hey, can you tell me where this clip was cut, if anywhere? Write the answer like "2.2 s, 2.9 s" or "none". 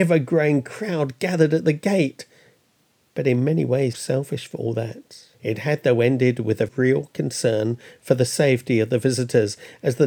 3.9 s, 5.3 s, 6.7 s